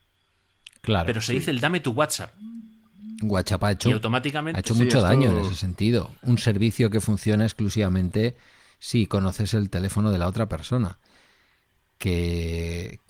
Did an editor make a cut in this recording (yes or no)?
no